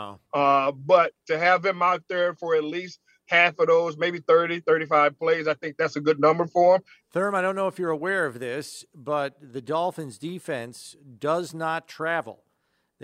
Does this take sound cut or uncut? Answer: cut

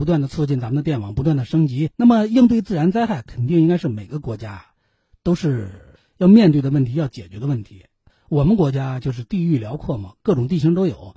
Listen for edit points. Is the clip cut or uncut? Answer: cut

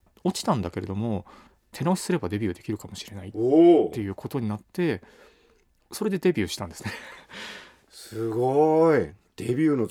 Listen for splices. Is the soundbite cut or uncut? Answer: uncut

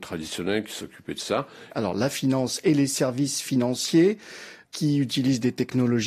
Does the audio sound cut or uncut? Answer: cut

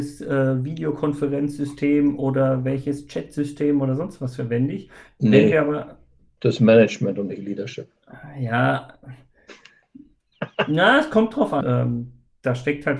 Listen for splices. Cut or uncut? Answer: cut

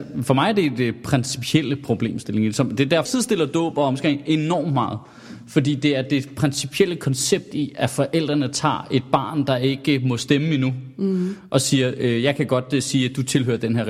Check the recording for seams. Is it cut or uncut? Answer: cut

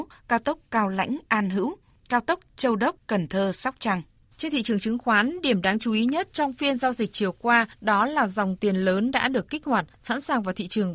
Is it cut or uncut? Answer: uncut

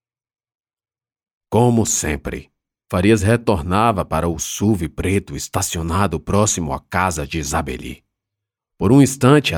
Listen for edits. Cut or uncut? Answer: cut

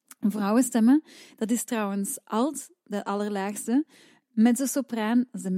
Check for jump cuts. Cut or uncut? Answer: uncut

